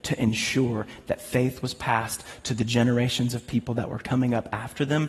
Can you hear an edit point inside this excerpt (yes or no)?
no